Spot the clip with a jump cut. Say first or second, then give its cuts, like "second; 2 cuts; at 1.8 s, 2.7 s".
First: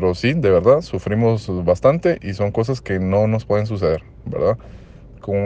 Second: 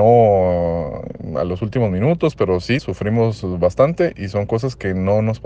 second; 1 cut; at 2.8 s